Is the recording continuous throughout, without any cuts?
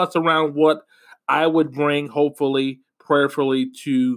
yes; 0 cuts

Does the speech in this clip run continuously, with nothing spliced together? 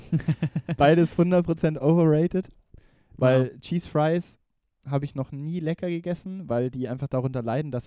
yes; 0 cuts

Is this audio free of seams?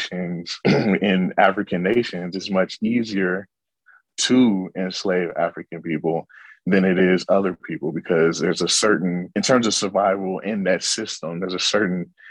yes; 0 cuts

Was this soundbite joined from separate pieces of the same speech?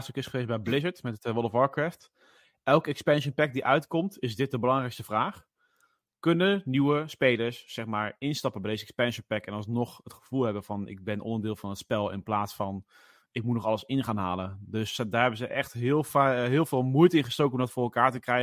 no; 0 cuts

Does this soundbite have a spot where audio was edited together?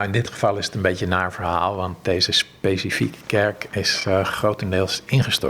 no; 0 cuts

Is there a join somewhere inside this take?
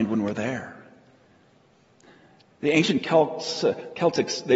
no; 0 cuts

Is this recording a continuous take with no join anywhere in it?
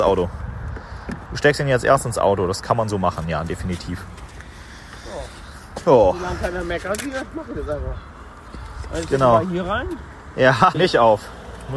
no; 1 cut; at 10.7 s

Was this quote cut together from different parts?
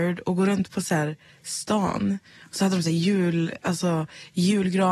no; 0 cuts

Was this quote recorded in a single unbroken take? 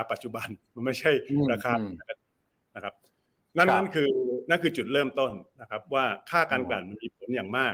yes; 0 cuts

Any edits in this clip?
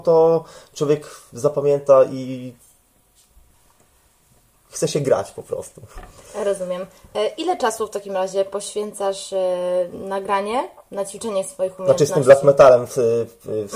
no; 0 cuts

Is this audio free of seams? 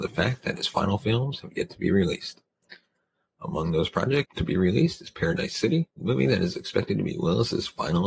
no; 2 cuts; at 4.2 s, 5.9 s

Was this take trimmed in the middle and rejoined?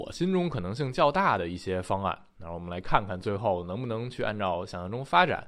no; 0 cuts

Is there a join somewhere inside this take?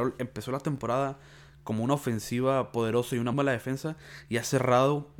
yes; 1 cut; at 3.3 s

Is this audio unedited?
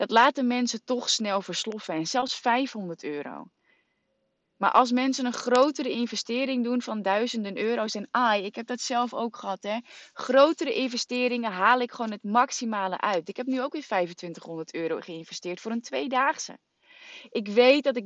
yes; 0 cuts

